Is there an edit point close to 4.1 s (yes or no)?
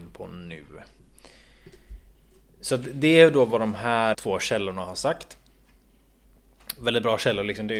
yes